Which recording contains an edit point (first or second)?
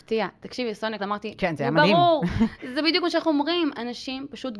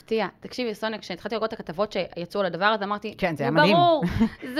first